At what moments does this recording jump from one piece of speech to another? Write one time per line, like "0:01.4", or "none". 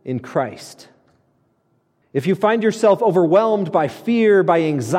0:02.0